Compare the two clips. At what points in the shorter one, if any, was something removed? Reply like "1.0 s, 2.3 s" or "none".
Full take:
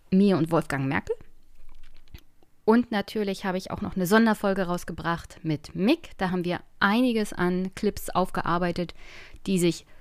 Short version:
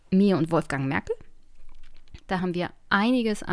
2.3 s